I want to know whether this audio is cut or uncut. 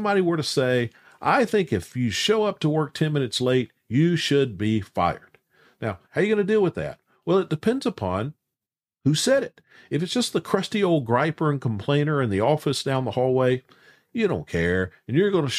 cut